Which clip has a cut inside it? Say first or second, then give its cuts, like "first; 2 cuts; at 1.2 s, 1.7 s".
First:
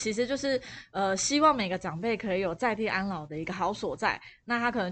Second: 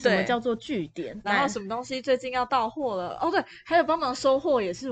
second; 1 cut; at 1.2 s